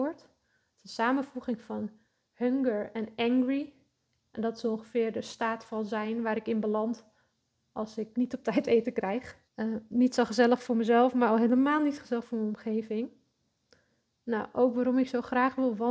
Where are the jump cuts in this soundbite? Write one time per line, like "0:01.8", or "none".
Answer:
0:08.1
0:09.5